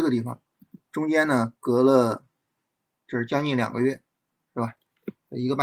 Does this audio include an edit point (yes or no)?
no